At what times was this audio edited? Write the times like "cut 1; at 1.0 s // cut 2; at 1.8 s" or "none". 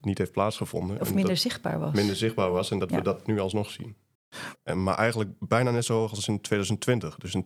cut 1; at 4.5 s

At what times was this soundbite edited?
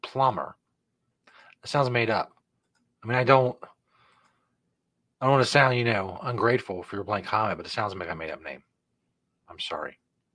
none

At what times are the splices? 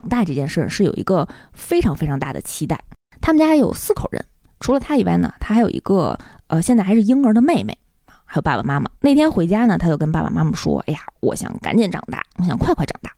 cut 1; at 9.0 s

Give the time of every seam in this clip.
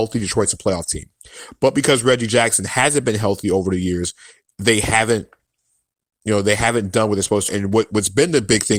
cut 1; at 7.5 s

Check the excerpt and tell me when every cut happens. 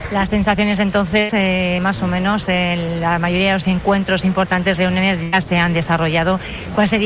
cut 1; at 1.8 s

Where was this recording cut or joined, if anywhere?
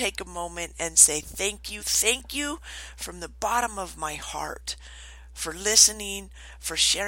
cut 1; at 1.8 s

